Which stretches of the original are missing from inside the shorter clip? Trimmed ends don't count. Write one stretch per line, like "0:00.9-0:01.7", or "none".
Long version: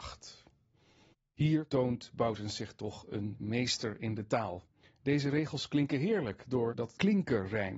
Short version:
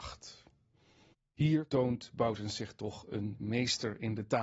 none